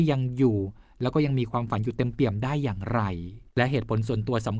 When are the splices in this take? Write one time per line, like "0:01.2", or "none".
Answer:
0:03.5